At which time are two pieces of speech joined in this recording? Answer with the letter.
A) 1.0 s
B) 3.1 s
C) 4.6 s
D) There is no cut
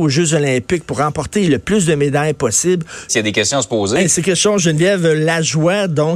B